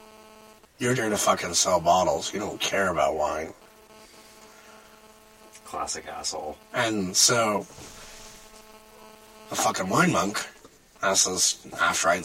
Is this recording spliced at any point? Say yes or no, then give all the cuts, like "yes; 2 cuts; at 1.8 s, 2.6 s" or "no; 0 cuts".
yes; 1 cut; at 1.0 s